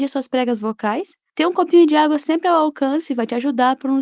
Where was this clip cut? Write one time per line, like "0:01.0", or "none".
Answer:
none